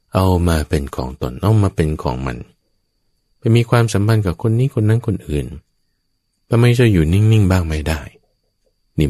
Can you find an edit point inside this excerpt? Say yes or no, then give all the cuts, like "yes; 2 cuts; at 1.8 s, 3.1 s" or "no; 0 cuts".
no; 0 cuts